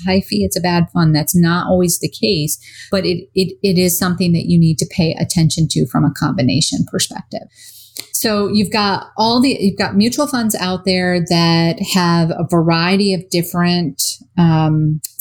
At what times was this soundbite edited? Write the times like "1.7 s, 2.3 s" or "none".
none